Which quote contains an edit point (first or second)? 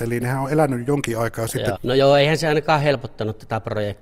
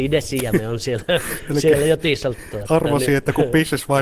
first